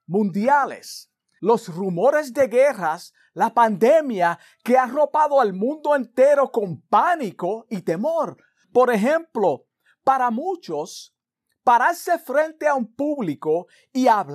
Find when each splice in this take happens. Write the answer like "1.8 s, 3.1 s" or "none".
1.4 s, 8.6 s